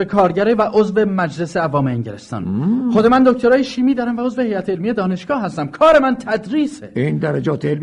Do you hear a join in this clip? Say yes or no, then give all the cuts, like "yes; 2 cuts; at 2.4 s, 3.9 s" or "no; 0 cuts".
no; 0 cuts